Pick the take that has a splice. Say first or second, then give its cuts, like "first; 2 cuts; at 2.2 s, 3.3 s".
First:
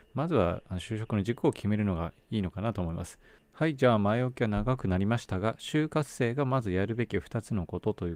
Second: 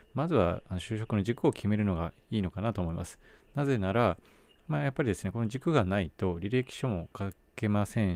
first; 1 cut; at 3.4 s